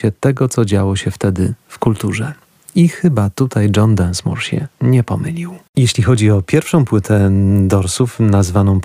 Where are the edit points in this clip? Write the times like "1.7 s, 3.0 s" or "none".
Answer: none